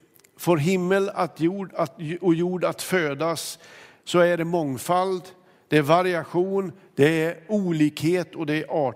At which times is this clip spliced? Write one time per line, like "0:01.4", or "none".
none